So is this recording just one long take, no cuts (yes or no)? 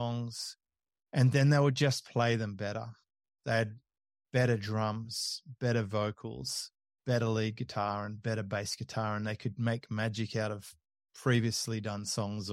yes